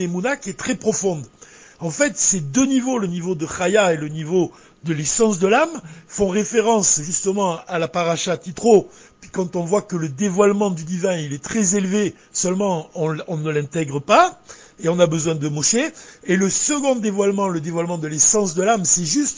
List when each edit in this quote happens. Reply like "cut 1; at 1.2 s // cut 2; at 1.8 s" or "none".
none